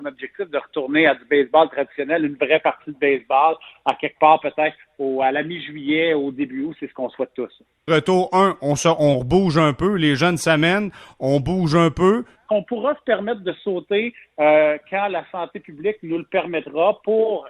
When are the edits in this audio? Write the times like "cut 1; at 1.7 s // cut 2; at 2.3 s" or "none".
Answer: cut 1; at 7.9 s // cut 2; at 12.4 s